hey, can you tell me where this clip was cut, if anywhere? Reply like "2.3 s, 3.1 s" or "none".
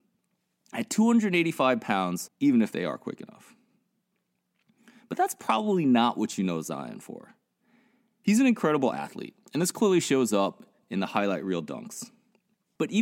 2.3 s